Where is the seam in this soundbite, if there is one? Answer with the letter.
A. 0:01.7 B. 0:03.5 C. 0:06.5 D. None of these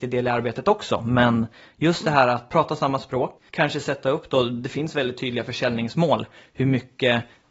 D